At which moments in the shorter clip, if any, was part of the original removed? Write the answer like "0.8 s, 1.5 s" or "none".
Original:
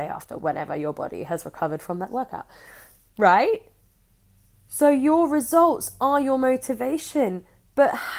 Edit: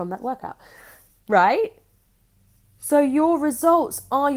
none